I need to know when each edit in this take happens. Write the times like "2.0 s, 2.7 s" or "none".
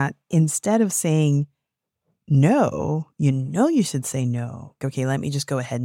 4.8 s